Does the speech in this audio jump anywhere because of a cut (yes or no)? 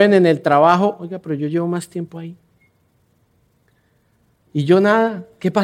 yes